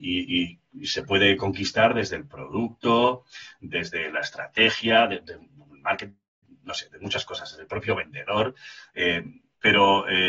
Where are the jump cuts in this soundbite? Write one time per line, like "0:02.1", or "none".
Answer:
none